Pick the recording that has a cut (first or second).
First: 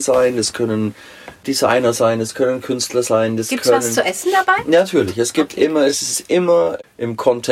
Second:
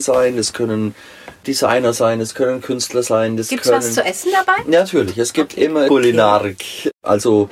second